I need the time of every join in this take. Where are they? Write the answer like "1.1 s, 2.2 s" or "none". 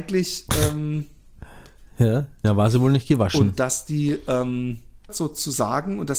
2.4 s, 5.1 s